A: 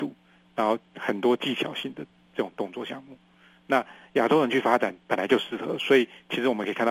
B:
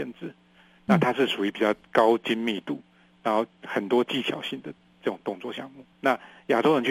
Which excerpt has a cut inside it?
B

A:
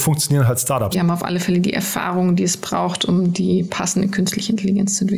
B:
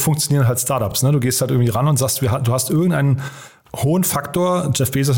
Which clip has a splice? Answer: A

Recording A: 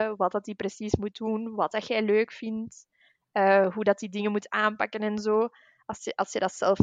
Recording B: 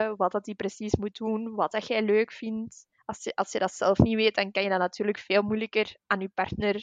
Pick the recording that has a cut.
B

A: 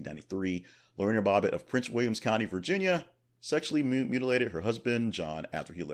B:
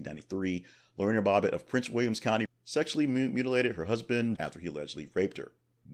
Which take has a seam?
B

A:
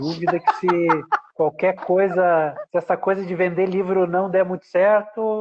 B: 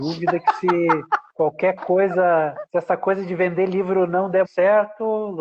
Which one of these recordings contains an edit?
B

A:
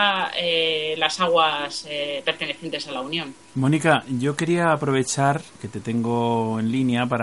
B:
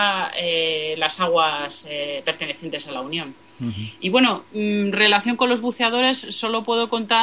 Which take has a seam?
A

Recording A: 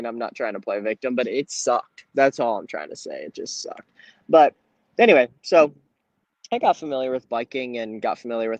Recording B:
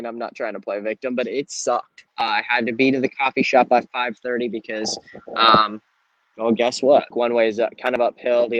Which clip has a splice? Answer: B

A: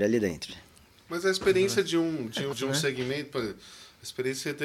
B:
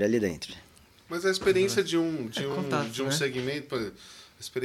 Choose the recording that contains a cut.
A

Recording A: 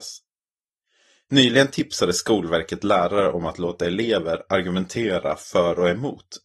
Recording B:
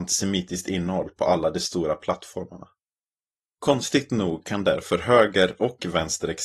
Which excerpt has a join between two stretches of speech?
B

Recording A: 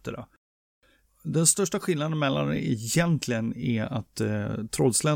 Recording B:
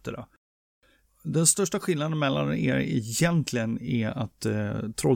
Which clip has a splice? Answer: A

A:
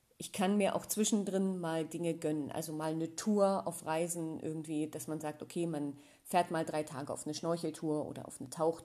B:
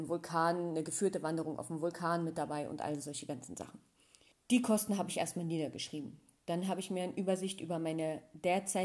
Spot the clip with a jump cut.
B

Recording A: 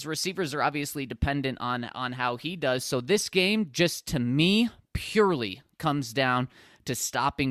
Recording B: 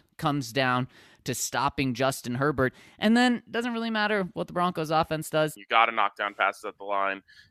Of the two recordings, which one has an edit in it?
B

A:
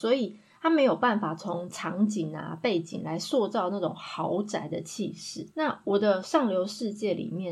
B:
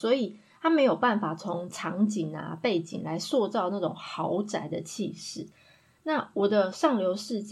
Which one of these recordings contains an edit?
A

